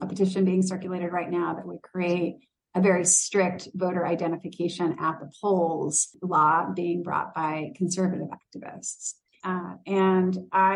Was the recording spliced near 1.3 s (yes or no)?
no